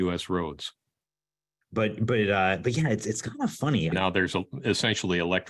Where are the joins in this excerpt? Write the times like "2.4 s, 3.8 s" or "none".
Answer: 1.6 s, 3.9 s